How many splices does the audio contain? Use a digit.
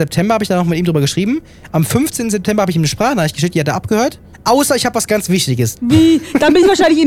2